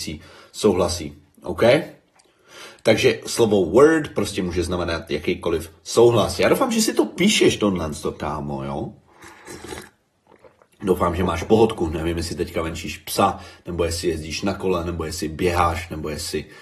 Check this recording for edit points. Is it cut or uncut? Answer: uncut